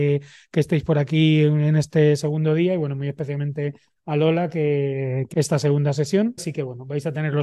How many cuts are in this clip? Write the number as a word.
two